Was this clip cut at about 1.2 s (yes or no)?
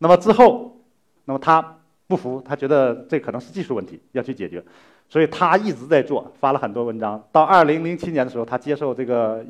yes